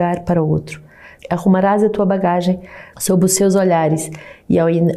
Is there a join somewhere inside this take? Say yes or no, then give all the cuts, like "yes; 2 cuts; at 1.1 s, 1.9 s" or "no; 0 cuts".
yes; 2 cuts; at 1.2 s, 2.9 s